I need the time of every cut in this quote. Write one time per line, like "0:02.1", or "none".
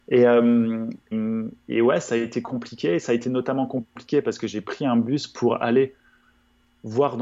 0:01.1